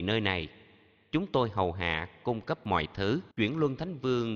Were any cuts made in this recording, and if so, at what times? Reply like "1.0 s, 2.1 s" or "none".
3.3 s